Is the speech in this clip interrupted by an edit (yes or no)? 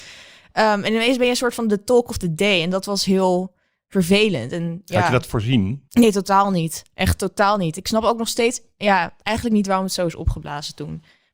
no